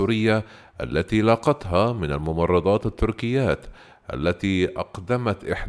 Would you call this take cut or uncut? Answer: uncut